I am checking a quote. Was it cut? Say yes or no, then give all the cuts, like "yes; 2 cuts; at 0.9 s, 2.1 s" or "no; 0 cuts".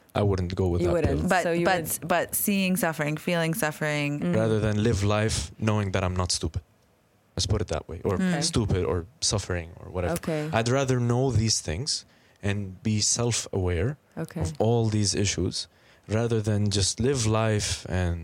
yes; 1 cut; at 4.3 s